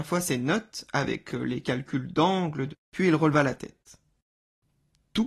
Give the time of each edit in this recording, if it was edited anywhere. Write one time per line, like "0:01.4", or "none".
0:02.7